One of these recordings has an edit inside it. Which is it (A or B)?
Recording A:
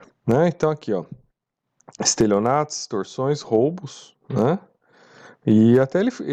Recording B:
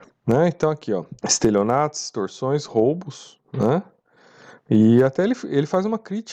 B